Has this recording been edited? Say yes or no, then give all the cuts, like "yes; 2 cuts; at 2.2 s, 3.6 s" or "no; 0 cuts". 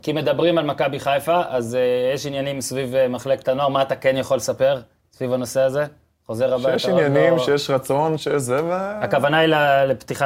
no; 0 cuts